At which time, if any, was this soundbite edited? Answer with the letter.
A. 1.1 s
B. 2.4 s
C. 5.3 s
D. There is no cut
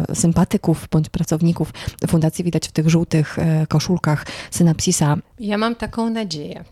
C